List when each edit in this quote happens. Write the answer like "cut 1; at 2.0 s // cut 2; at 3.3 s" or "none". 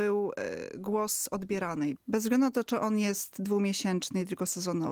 cut 1; at 2.0 s